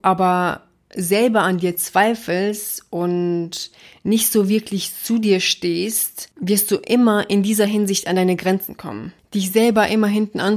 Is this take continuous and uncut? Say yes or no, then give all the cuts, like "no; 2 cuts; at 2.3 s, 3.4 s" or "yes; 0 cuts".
yes; 0 cuts